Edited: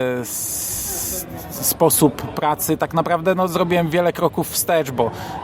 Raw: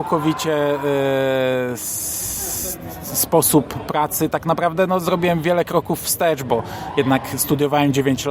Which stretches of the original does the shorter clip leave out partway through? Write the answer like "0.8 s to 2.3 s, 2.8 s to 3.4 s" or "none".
none